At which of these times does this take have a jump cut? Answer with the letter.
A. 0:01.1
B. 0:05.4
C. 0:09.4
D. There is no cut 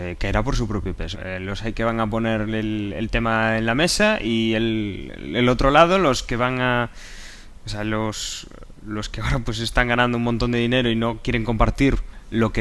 A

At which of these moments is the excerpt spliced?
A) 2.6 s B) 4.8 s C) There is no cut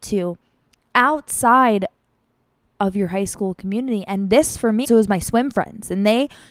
B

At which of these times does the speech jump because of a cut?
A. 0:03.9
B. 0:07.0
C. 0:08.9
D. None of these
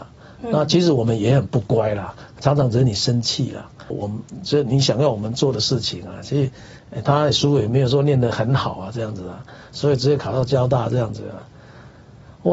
A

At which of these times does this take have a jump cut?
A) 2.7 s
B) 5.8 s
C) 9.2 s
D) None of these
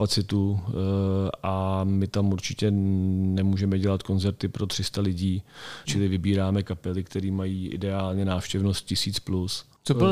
B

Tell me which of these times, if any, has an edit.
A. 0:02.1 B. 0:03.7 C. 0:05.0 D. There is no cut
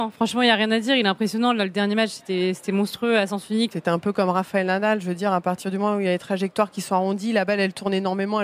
B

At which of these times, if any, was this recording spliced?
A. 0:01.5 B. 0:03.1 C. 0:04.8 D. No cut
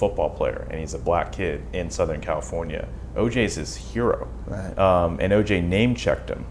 C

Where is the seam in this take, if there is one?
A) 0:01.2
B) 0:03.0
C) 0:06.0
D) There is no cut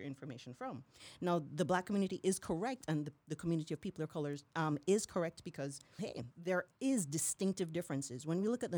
C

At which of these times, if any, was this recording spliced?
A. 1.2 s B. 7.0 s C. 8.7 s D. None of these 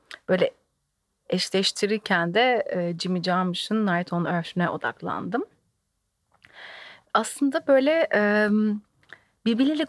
D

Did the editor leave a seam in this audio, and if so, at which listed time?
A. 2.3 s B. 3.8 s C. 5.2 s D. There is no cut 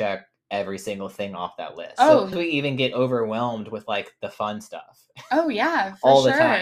A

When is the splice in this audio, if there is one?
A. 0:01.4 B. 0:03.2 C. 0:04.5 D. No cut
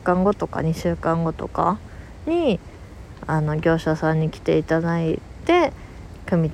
D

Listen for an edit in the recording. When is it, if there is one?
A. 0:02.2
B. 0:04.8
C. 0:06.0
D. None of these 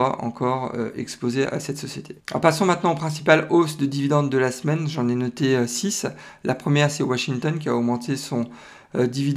A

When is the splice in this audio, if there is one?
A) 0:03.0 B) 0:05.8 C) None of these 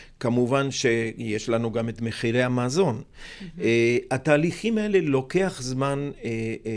C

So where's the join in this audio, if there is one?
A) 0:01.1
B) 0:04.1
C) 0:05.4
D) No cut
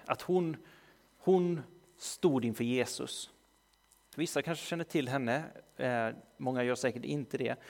B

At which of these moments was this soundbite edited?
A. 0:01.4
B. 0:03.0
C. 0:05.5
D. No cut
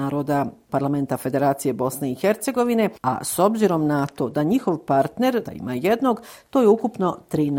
C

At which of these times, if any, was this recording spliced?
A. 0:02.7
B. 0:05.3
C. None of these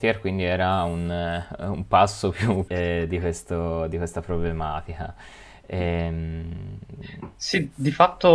A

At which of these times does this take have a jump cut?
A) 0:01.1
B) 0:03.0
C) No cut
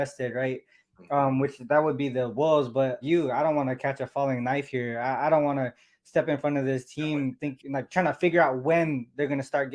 B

